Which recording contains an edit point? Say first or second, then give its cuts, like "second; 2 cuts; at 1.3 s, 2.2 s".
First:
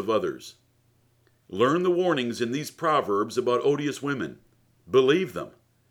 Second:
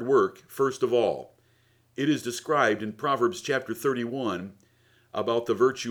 first; 1 cut; at 1.4 s